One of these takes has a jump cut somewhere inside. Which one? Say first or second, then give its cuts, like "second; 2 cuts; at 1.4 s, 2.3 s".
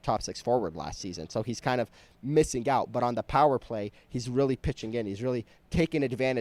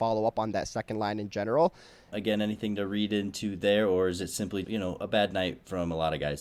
second; 2 cuts; at 2.1 s, 4.6 s